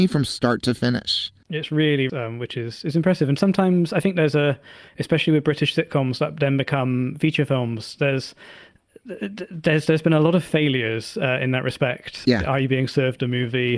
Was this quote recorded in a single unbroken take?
no; 1 cut; at 2.1 s

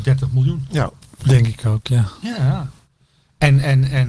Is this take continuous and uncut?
yes; 0 cuts

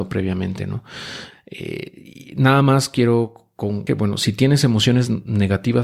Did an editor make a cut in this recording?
yes; 2 cuts; at 1.3 s, 3.9 s

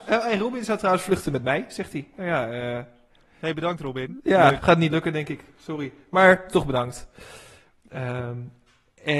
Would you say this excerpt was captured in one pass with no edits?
no; 1 cut; at 4.6 s

